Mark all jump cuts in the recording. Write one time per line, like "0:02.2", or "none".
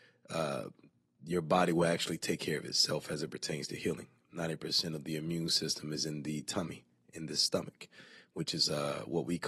none